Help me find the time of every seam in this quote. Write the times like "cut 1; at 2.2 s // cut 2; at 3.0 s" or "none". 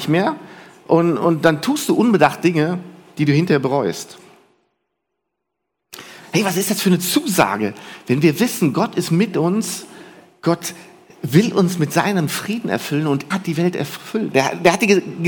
cut 1; at 6.2 s // cut 2; at 13.3 s // cut 3; at 14.3 s